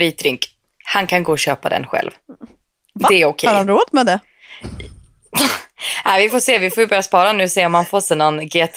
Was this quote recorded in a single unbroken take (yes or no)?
yes